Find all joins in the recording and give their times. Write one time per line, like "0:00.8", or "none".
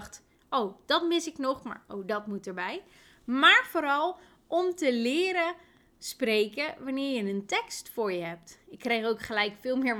none